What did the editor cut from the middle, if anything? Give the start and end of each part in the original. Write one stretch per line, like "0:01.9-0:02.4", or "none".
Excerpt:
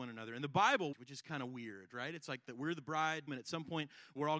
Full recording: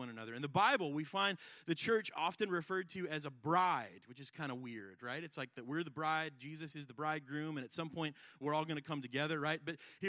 0:00.9-0:04.0
0:06.4-0:07.5